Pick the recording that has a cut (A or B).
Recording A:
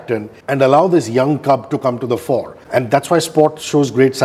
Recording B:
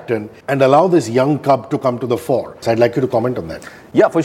B